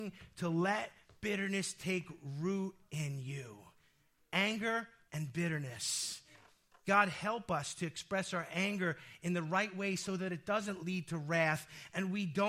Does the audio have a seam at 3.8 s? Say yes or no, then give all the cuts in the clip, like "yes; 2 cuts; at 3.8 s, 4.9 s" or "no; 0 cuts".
no; 1 cut; at 5.1 s